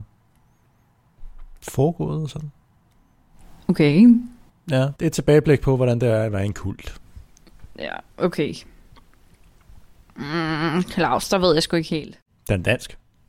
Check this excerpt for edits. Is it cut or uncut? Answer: cut